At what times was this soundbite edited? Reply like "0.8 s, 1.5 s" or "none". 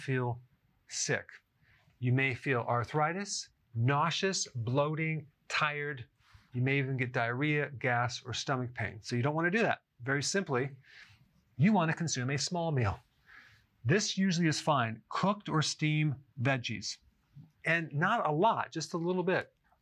none